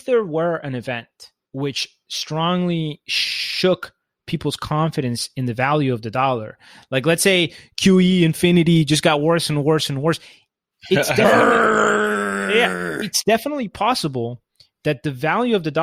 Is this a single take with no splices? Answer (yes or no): yes